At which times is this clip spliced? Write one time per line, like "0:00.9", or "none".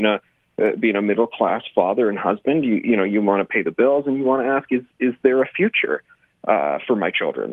none